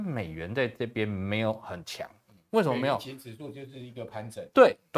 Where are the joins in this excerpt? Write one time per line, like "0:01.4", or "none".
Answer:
0:02.5

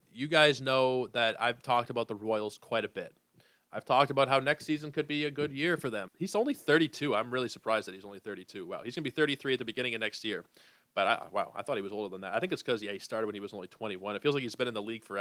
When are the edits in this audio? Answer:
0:06.1

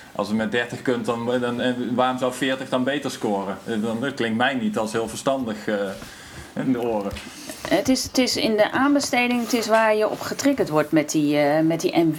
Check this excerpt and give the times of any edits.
0:06.6

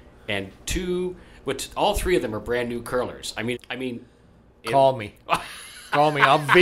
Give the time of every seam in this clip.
0:03.5

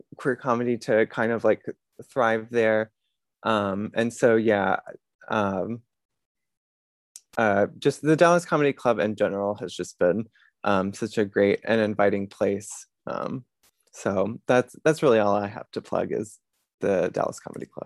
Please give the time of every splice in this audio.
none

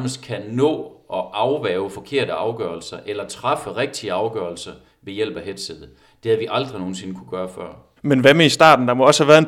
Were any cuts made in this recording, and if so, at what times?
0:08.0

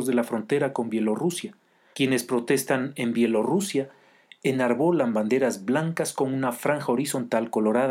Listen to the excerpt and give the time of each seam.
0:01.9

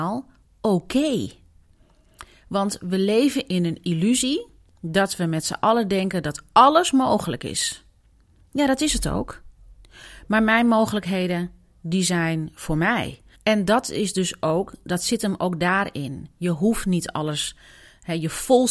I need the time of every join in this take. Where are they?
0:13.3

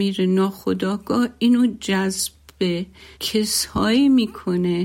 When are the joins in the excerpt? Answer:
0:03.1

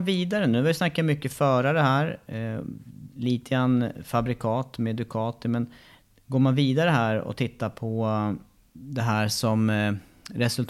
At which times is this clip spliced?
none

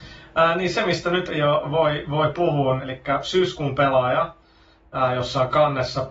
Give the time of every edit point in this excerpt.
0:01.3
0:02.8

